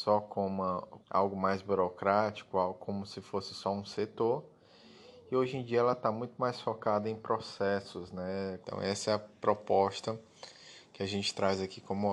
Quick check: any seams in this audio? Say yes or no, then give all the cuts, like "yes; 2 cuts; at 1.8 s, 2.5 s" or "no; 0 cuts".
yes; 2 cuts; at 1.0 s, 8.6 s